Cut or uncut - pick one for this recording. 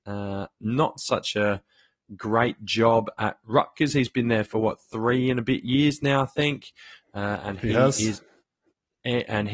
uncut